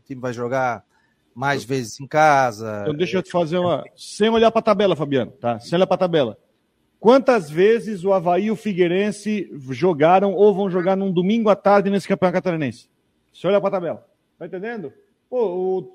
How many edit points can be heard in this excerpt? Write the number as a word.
one